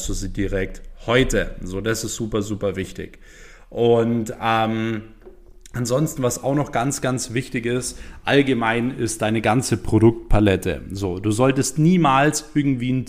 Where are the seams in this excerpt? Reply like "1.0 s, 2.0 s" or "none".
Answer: none